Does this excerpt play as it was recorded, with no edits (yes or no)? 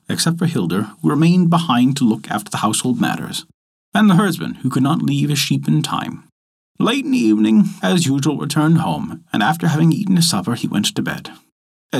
no